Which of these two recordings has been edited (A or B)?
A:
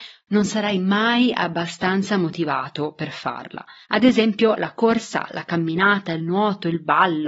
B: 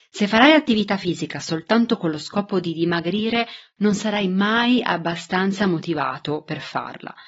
A